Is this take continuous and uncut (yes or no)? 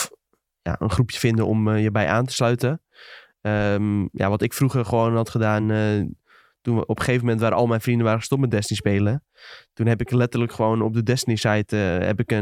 yes